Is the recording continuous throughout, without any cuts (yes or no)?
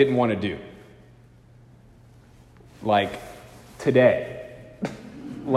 yes